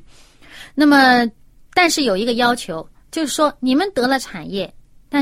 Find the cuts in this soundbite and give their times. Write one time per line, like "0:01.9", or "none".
none